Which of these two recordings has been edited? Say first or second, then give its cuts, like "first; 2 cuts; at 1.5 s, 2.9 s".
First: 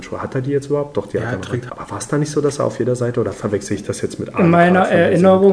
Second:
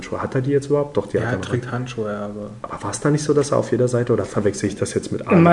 first; 1 cut; at 1.7 s